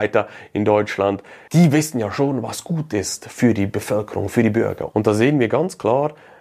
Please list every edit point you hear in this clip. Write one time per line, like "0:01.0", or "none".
0:04.9